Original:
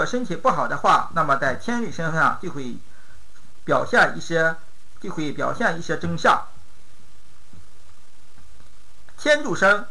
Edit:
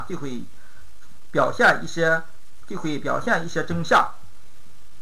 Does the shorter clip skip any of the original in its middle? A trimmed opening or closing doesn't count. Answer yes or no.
no